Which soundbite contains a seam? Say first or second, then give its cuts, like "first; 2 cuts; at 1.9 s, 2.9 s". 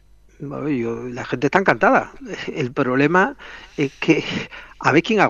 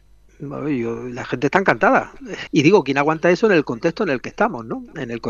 second; 1 cut; at 2.5 s